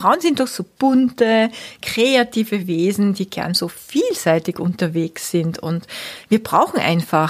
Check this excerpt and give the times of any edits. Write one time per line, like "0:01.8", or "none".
none